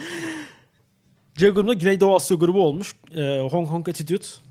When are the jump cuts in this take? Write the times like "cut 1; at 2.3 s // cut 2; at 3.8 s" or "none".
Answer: none